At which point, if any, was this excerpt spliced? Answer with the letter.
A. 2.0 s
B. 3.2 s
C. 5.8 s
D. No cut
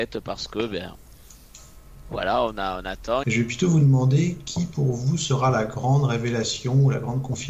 B